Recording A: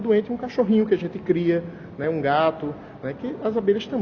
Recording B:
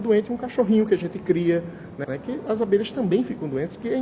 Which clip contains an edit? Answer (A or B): B